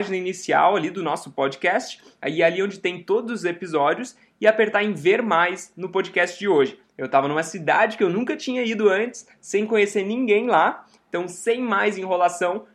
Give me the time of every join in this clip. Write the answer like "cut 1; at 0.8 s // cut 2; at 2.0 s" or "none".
cut 1; at 6.8 s // cut 2; at 11.0 s